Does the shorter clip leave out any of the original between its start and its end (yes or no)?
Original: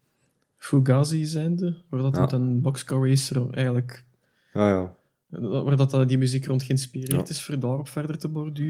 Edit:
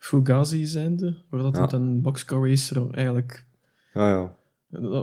no